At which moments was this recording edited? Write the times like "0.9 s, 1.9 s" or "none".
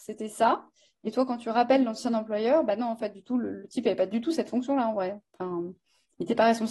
none